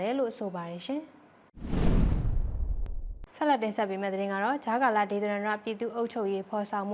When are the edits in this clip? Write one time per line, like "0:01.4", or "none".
0:03.3